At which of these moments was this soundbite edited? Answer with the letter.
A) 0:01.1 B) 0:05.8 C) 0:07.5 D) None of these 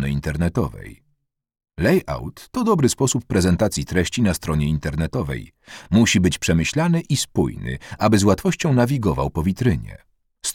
D